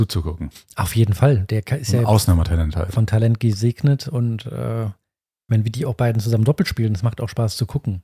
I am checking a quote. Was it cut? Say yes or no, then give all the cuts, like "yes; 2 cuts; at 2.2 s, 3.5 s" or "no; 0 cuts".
no; 0 cuts